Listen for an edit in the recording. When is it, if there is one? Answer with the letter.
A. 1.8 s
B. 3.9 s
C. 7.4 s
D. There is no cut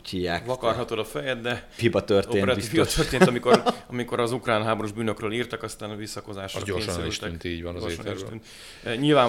A